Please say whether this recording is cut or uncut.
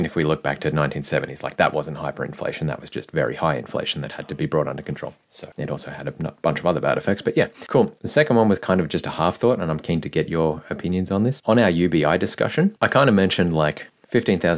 uncut